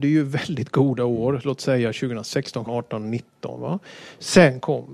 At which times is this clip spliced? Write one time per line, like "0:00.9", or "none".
0:02.7